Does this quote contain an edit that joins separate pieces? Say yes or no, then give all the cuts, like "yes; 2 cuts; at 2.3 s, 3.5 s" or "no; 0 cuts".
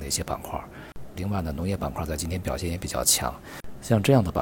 yes; 1 cut; at 1.1 s